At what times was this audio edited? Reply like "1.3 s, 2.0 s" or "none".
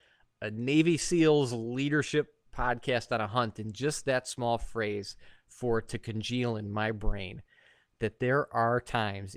none